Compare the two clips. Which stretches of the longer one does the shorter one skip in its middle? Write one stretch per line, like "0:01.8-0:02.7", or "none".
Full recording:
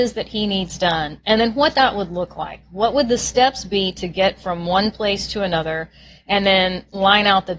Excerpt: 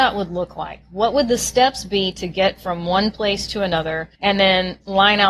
0:05.9-0:06.2

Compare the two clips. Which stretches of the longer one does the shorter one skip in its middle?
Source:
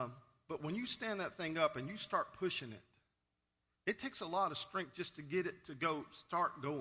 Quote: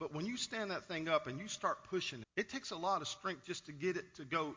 0:02.7-0:03.7

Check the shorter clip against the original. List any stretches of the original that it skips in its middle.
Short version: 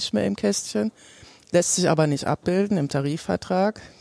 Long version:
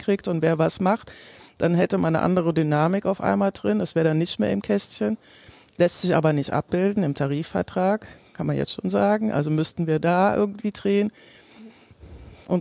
none

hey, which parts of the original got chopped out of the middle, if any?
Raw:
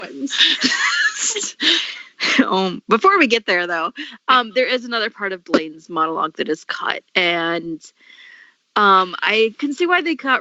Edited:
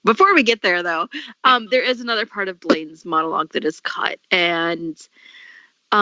none

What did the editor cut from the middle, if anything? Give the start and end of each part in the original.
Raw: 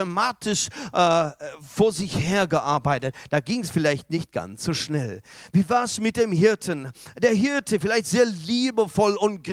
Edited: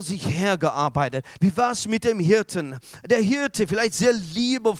0:03.3-0:05.5

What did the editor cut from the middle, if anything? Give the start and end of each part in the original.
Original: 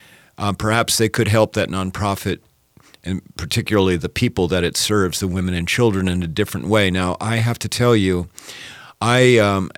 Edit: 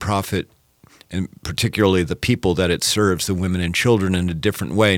none

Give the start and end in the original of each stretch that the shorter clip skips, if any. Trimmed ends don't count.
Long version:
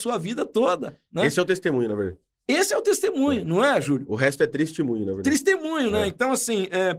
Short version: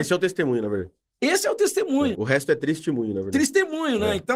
0:03.4-0:04.1

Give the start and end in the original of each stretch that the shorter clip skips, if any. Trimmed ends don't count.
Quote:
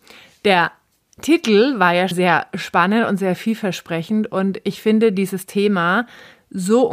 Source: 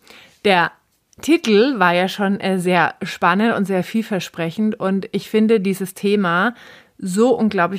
0:02.1-0:02.6

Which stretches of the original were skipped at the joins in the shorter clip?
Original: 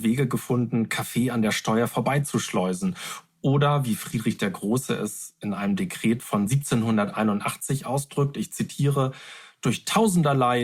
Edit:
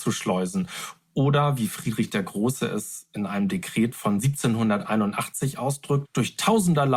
0:08.3-0:09.5

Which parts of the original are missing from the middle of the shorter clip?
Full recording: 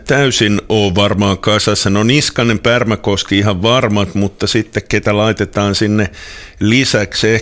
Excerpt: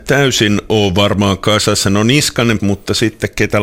0:02.6-0:04.1

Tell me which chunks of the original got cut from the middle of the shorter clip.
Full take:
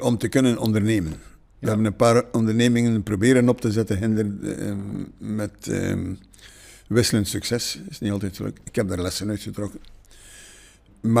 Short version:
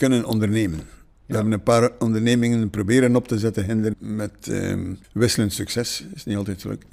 0:04.3-0:05.1
0:06.2-0:06.8

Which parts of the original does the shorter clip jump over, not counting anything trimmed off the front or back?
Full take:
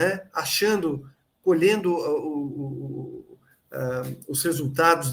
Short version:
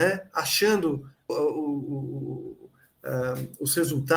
0:01.3-0:02.0

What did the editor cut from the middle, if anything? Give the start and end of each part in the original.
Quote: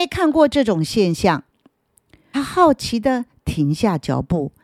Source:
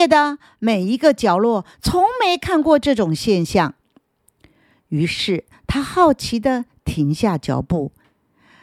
0:04.6-0:05.7

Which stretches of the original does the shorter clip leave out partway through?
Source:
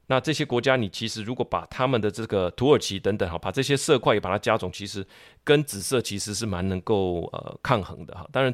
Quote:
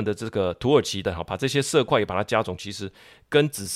0:03.0-0:03.2

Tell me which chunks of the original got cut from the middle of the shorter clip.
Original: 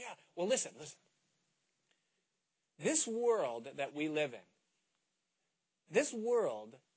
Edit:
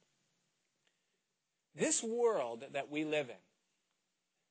none

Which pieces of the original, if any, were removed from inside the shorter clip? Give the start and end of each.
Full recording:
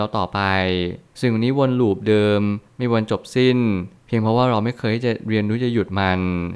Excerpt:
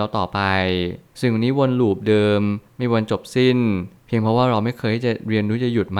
none

